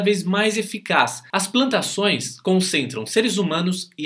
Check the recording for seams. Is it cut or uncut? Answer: uncut